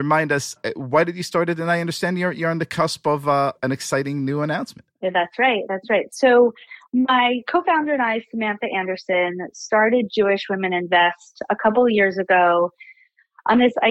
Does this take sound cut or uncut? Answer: uncut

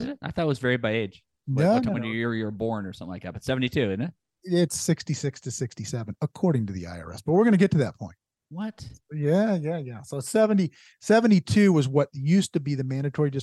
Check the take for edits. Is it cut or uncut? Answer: uncut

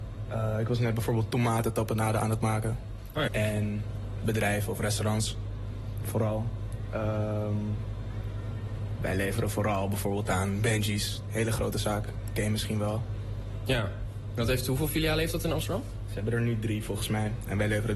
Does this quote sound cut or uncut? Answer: cut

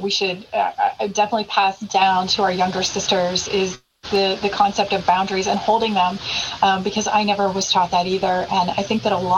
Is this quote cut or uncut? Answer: uncut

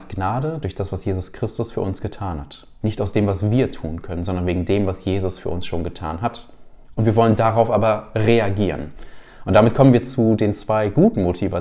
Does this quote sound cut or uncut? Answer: uncut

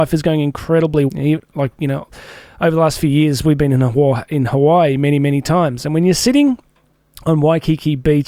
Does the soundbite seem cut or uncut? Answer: cut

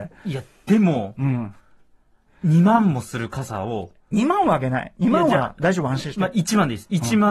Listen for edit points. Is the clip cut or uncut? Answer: uncut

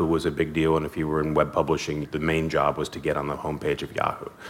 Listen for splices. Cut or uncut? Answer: cut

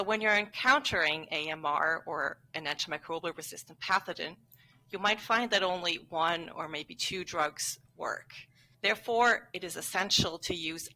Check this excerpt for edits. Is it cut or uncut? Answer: cut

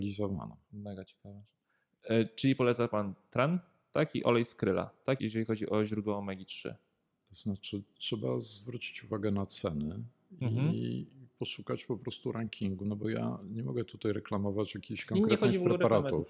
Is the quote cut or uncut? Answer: cut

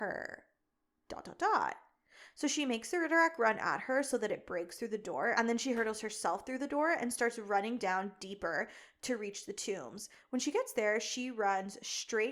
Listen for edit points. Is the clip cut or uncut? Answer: uncut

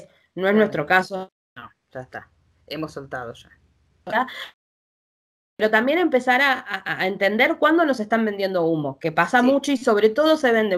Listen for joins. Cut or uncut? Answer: uncut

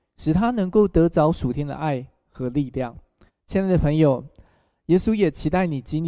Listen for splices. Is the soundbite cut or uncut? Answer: cut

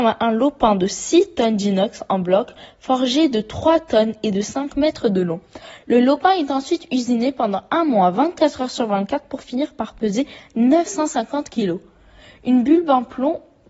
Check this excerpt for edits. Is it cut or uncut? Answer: uncut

